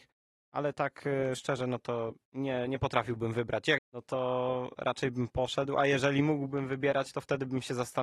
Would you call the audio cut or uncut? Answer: cut